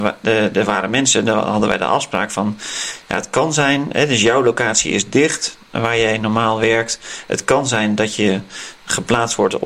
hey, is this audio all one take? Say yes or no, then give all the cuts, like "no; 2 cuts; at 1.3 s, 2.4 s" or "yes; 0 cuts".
yes; 0 cuts